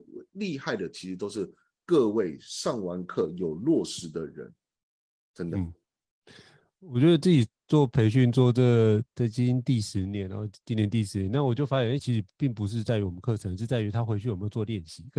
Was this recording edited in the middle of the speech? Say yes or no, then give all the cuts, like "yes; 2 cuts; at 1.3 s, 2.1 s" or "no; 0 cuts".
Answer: yes; 1 cut; at 12.0 s